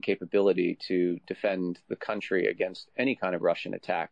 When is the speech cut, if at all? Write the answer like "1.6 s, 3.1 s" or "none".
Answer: none